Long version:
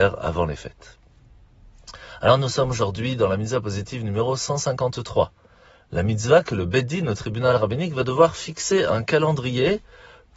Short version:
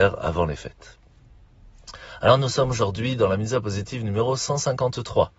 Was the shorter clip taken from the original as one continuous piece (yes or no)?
yes